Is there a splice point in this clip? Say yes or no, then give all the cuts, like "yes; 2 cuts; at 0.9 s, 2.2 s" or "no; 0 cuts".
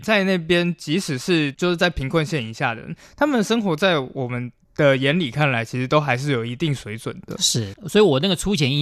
no; 0 cuts